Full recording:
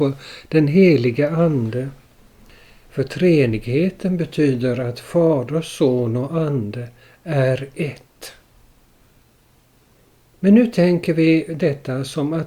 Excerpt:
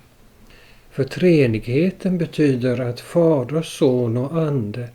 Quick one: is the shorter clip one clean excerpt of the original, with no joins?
yes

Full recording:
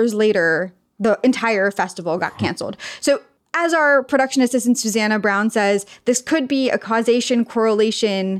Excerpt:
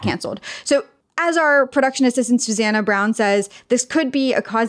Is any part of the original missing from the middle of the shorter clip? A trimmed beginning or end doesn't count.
no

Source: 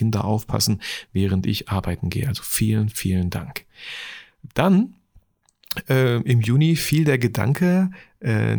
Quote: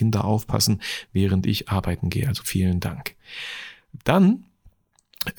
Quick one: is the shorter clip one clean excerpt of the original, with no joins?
no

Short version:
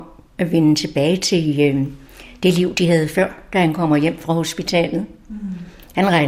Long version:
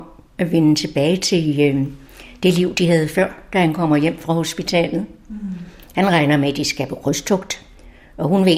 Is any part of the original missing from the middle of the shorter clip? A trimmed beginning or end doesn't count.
no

